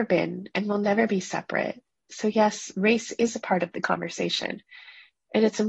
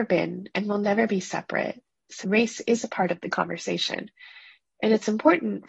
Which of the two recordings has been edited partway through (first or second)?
second